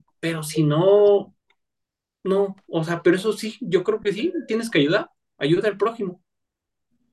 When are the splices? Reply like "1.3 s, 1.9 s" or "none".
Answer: none